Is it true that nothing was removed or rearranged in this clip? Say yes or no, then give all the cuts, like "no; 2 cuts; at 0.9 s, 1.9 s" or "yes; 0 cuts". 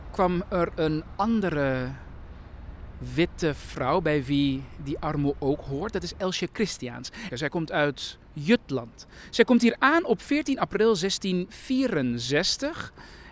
no; 1 cut; at 7.3 s